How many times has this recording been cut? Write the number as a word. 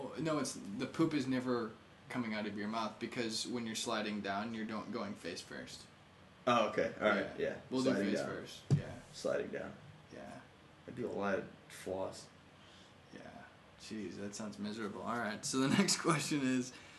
zero